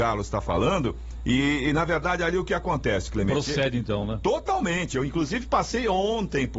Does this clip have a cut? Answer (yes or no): no